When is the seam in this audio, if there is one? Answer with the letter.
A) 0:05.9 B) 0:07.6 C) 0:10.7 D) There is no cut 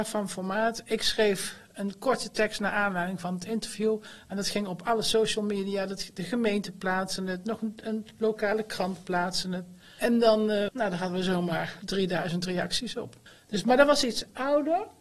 C